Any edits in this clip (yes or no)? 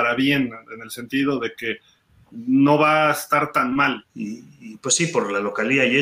yes